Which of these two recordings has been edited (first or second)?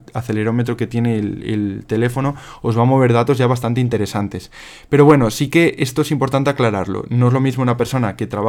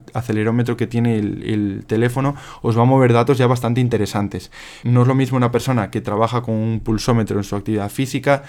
second